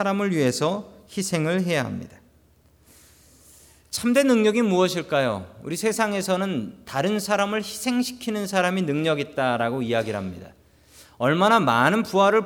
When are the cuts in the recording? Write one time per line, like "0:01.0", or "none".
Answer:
none